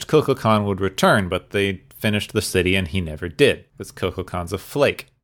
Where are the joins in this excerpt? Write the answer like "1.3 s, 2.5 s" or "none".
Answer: 3.7 s